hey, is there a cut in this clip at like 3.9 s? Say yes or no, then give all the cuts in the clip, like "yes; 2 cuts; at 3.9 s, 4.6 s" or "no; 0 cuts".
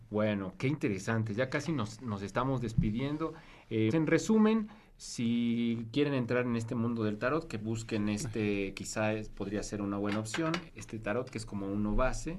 yes; 2 cuts; at 3.9 s, 10.7 s